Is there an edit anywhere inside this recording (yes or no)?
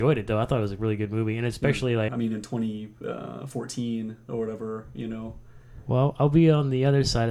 yes